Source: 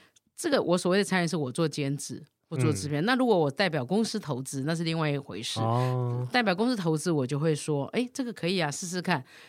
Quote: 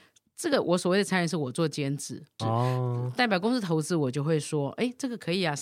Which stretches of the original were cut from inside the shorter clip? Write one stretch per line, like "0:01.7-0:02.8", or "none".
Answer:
0:02.4-0:05.6